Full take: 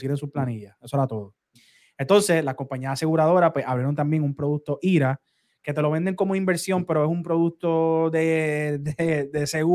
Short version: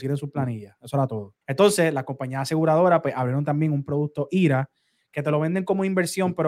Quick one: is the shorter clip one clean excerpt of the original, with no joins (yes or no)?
no